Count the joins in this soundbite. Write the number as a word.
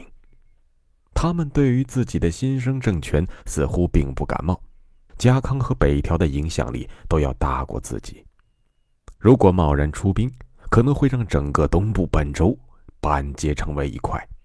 one